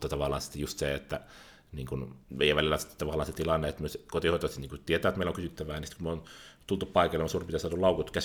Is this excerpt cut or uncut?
cut